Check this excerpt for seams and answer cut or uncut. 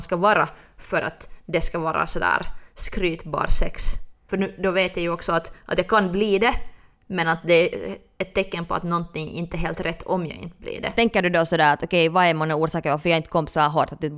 cut